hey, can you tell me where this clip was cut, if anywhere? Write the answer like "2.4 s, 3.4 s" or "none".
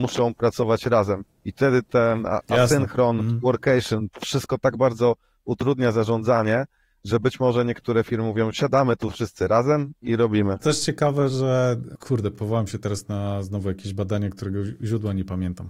none